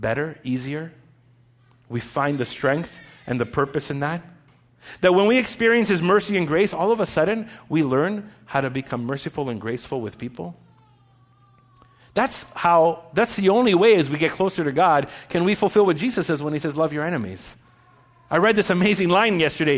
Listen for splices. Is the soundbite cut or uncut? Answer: uncut